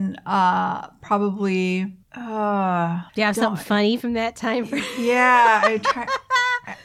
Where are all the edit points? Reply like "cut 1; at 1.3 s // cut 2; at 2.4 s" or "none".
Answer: cut 1; at 3.1 s